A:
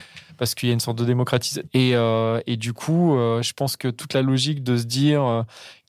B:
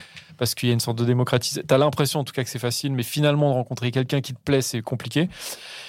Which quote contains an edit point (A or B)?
A